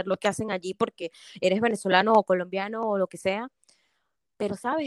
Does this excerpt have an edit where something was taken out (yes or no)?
no